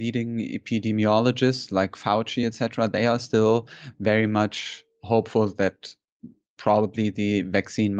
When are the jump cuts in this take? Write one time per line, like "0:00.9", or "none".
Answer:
none